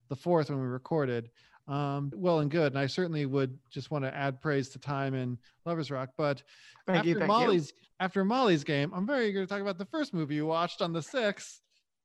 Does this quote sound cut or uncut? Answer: cut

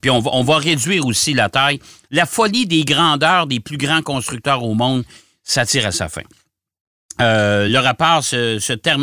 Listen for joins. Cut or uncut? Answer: uncut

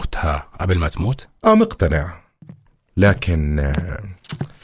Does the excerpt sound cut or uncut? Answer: cut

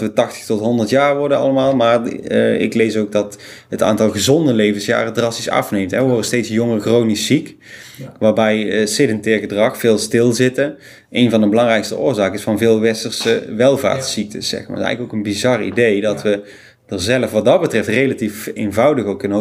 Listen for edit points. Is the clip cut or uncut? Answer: uncut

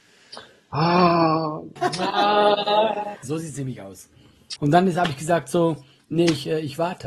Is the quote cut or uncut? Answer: cut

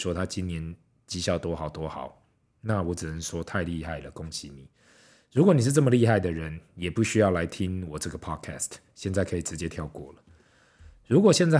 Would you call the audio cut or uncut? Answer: uncut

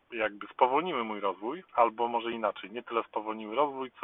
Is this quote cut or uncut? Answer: cut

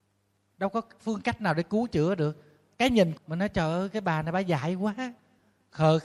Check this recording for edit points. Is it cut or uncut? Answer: cut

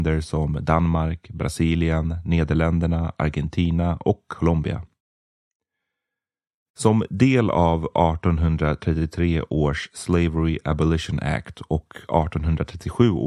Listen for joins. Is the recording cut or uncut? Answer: uncut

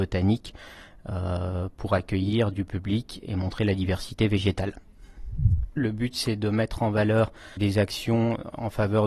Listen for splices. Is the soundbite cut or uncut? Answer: cut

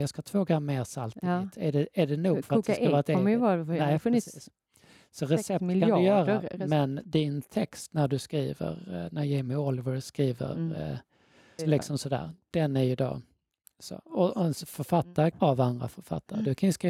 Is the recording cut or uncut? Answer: cut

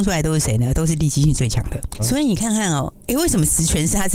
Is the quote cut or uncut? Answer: cut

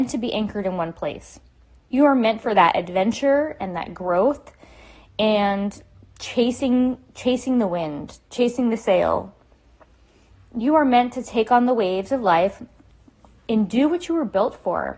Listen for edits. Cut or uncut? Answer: uncut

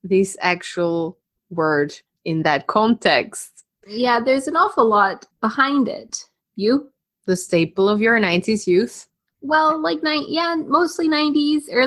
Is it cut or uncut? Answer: cut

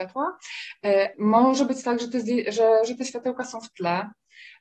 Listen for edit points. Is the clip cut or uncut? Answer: cut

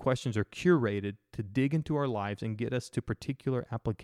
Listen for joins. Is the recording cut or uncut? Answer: uncut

